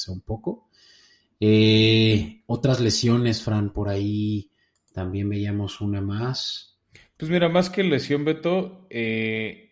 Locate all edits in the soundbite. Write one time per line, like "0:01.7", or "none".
none